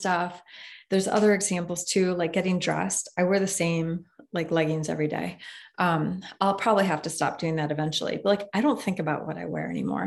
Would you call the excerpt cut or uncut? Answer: uncut